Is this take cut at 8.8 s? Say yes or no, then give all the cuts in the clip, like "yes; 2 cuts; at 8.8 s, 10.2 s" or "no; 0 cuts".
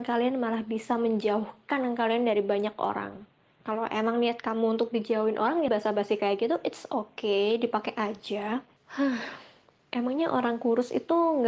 yes; 2 cuts; at 5.7 s, 8.8 s